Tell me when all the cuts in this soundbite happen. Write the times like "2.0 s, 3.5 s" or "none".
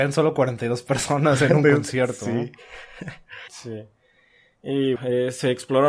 3.5 s, 5.0 s

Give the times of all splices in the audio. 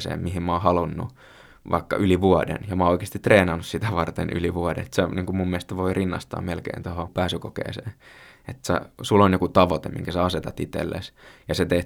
none

